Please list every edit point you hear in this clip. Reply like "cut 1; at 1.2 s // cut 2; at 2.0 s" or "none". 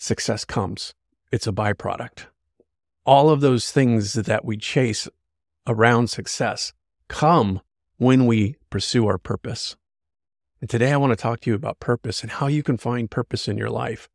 none